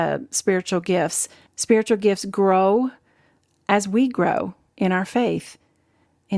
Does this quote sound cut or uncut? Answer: cut